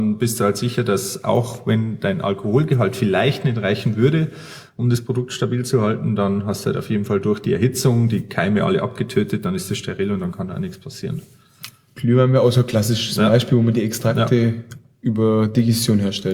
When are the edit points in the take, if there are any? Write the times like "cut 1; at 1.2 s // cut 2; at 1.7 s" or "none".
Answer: none

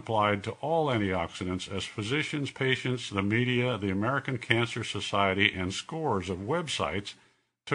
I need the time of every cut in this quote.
none

